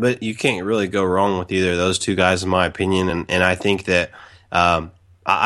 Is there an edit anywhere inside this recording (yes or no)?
no